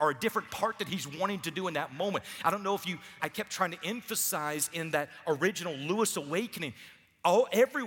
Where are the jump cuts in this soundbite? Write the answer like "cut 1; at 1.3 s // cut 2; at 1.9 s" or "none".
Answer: cut 1; at 3.2 s